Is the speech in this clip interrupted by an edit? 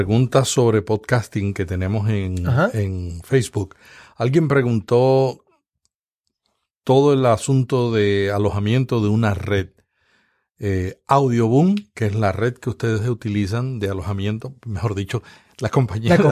no; 0 cuts

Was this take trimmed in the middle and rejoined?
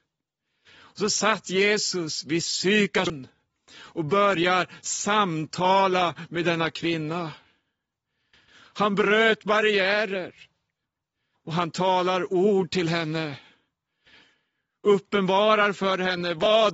yes; 1 cut; at 11.3 s

